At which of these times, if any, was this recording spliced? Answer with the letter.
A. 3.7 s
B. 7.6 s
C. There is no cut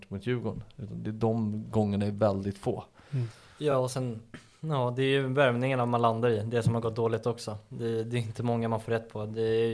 C